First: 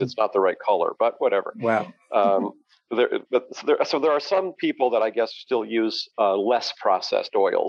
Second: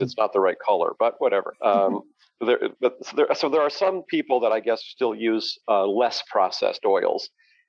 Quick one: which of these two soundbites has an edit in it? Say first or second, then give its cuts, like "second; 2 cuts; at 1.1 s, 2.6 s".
second; 1 cut; at 1.5 s